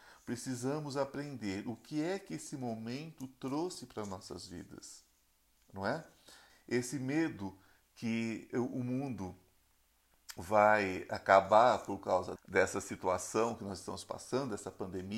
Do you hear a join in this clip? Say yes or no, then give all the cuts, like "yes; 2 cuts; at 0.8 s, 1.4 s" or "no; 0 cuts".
yes; 2 cuts; at 6.5 s, 12.4 s